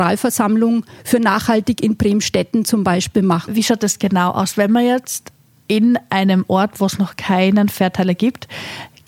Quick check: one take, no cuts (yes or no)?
no